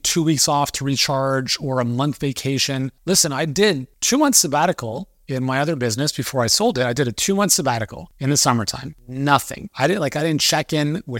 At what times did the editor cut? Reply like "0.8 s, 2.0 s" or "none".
none